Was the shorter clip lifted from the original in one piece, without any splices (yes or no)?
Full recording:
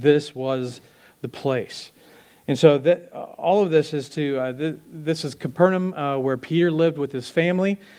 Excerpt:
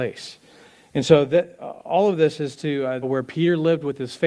no